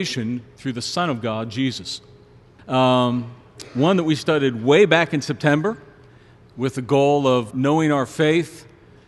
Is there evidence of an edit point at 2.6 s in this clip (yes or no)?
yes